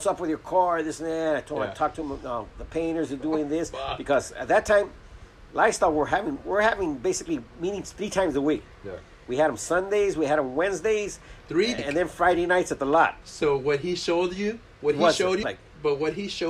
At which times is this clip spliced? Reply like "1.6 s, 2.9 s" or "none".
11.8 s, 13.2 s, 15.4 s